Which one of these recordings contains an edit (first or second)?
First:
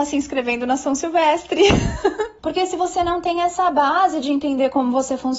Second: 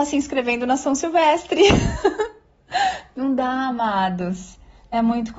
first